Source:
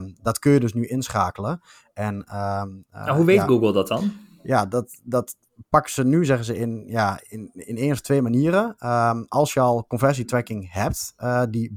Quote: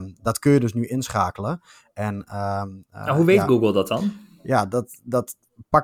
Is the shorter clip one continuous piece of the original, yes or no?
yes